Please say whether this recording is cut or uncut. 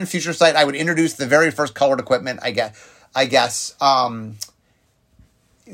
uncut